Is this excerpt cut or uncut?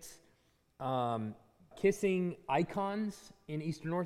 cut